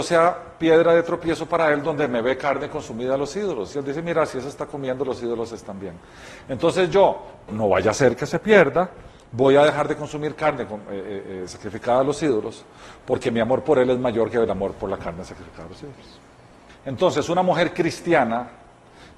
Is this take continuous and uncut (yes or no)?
no